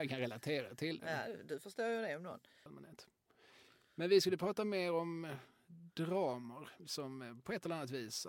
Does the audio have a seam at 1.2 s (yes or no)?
no